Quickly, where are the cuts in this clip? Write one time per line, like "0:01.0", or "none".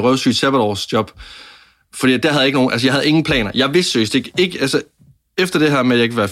none